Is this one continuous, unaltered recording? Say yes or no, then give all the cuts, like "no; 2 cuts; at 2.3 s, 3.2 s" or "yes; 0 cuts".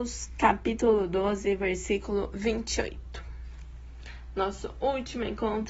yes; 0 cuts